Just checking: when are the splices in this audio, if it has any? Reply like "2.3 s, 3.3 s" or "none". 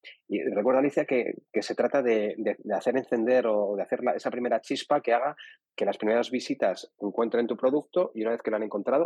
none